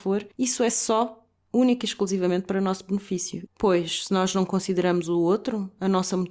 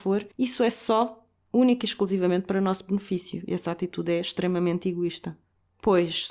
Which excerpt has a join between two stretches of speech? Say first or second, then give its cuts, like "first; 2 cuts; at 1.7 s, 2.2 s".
first; 1 cut; at 3.5 s